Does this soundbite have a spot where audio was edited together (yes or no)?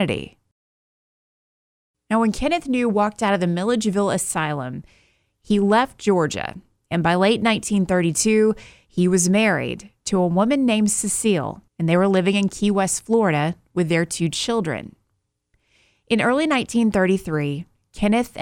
yes